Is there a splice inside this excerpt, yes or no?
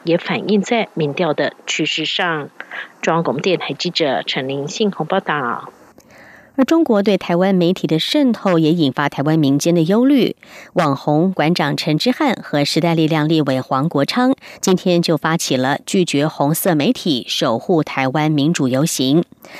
no